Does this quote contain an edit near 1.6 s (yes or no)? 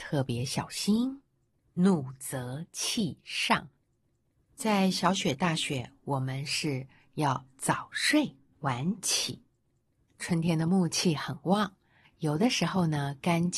no